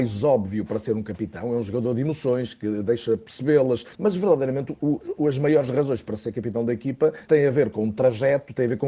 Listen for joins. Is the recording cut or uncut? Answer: cut